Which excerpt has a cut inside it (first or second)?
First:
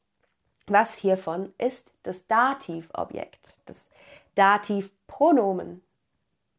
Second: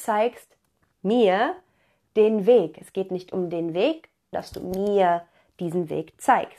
second